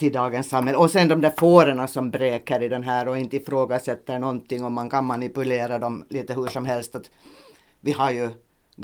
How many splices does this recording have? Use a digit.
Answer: 0